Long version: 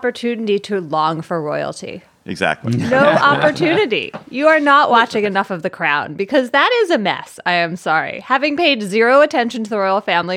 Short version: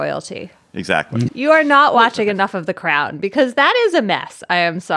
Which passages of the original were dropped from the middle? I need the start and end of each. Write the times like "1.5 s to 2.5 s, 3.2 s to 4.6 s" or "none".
2.8 s to 4.2 s